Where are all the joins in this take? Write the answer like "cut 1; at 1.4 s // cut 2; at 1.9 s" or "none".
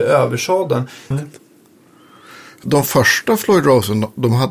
cut 1; at 1.1 s // cut 2; at 2.6 s

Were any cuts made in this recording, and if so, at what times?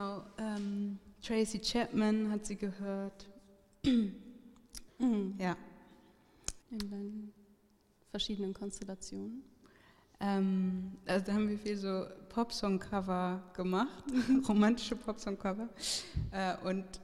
cut 1; at 4.9 s // cut 2; at 6.6 s

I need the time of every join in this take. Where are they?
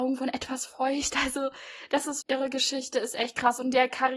cut 1; at 2.2 s

